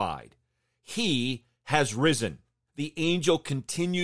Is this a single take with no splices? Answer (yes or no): no